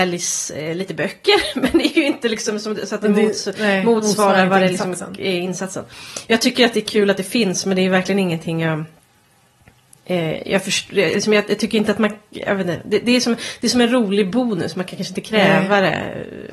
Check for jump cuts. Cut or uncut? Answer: uncut